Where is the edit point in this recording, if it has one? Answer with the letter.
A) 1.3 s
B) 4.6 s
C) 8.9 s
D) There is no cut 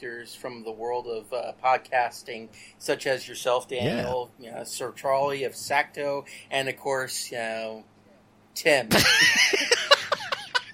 D